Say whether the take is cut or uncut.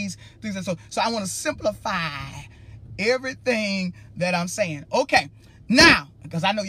uncut